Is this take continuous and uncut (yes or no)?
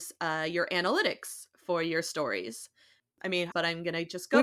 no